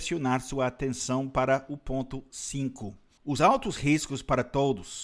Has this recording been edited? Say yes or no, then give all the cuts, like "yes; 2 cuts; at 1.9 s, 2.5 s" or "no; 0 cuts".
yes; 1 cut; at 3.2 s